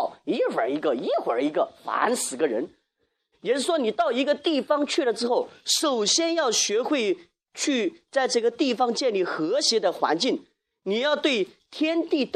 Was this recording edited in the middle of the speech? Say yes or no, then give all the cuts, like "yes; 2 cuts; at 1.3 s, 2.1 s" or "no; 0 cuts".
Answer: yes; 1 cut; at 3.3 s